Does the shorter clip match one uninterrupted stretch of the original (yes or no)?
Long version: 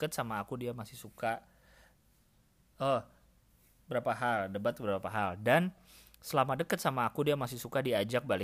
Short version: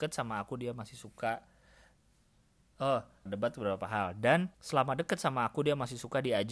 no